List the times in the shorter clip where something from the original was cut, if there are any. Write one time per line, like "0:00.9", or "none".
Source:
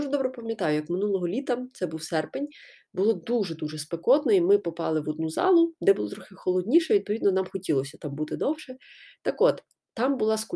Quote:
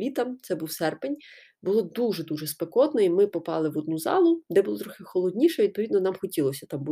none